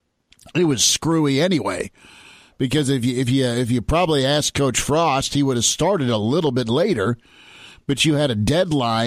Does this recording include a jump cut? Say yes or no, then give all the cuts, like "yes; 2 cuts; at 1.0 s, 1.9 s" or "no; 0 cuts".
no; 0 cuts